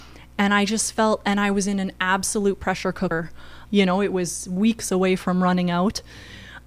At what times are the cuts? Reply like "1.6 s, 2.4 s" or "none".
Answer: 3.7 s